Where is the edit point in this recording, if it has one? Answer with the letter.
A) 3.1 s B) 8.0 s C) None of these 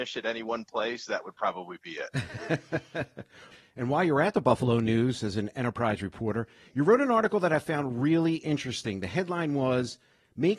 C